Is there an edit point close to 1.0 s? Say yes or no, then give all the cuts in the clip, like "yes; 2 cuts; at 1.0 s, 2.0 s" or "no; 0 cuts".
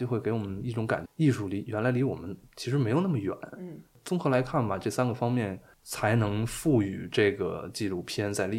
yes; 1 cut; at 1.0 s